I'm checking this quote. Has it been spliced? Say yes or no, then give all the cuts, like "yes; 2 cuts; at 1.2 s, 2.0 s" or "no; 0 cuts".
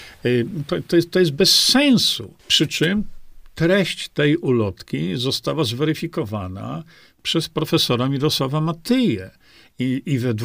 yes; 1 cut; at 2.4 s